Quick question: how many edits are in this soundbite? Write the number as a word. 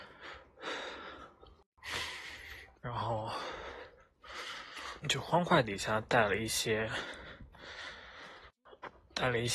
two